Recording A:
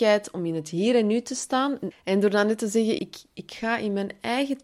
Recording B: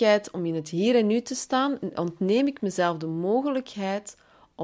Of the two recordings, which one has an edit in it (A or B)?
A